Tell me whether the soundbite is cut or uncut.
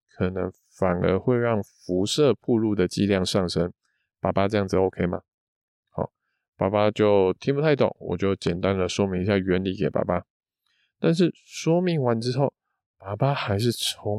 uncut